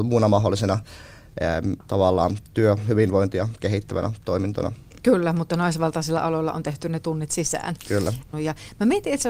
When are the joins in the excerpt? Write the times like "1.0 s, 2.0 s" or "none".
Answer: 8.3 s